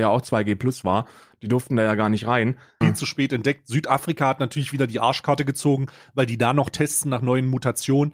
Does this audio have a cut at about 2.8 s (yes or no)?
yes